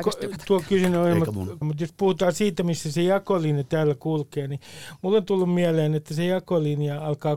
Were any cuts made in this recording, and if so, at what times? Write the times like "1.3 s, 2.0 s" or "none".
1.6 s